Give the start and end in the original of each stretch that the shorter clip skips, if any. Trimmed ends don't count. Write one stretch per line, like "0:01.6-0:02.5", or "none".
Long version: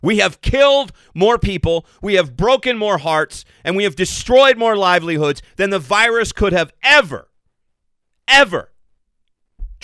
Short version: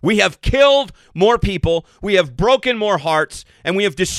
none